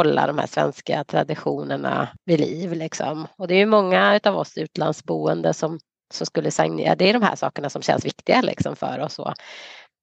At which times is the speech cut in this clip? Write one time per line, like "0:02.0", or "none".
none